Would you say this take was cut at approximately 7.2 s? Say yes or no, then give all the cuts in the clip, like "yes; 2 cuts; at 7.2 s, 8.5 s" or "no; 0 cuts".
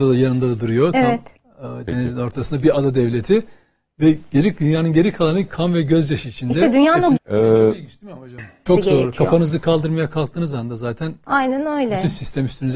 yes; 2 cuts; at 7.2 s, 8.7 s